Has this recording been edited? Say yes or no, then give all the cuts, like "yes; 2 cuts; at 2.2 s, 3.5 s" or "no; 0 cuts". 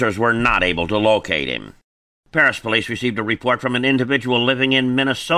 no; 0 cuts